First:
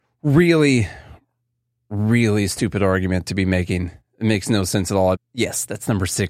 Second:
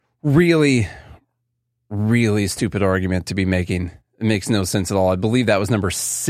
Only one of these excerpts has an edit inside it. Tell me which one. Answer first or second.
first